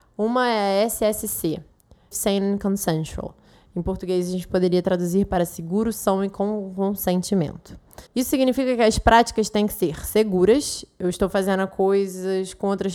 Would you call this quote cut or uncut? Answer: cut